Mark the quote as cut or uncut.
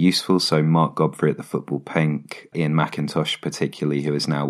uncut